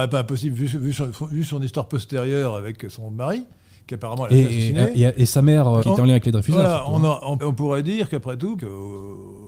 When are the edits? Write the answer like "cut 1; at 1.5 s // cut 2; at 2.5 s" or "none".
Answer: cut 1; at 5.8 s // cut 2; at 7.4 s // cut 3; at 8.6 s